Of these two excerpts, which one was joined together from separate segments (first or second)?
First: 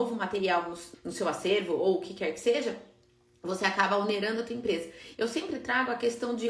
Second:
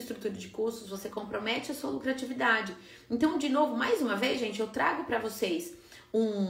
first